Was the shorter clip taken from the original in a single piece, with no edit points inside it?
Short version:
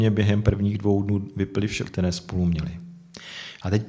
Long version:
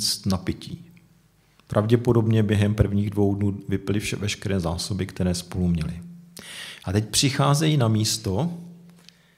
no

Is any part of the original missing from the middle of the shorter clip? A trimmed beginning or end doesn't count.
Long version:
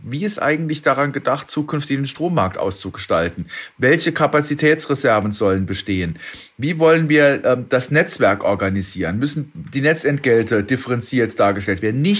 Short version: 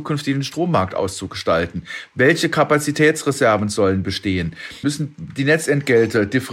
yes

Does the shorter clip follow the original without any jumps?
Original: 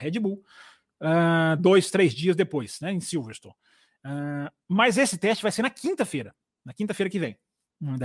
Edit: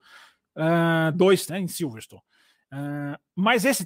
no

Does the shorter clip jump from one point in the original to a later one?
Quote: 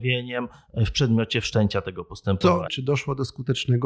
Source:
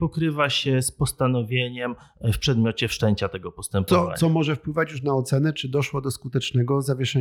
yes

